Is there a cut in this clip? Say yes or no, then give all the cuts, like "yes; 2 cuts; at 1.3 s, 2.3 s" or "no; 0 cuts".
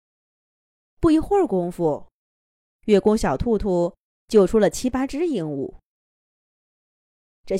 no; 0 cuts